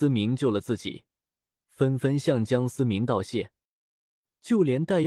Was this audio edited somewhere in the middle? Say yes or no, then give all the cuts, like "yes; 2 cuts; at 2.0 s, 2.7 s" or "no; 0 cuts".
no; 0 cuts